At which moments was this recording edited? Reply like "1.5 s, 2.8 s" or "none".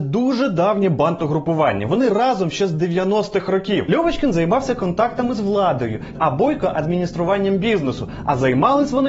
3.9 s, 6.1 s